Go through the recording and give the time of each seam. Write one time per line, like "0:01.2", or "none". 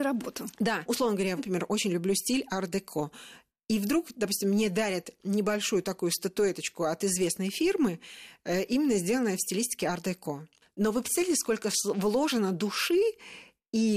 0:01.4